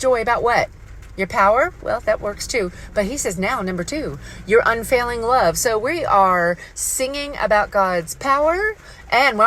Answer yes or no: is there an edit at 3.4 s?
no